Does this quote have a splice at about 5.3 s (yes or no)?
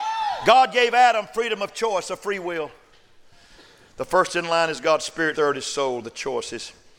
yes